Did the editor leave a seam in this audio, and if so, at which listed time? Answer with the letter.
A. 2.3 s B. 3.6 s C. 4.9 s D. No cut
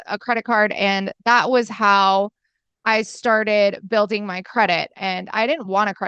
C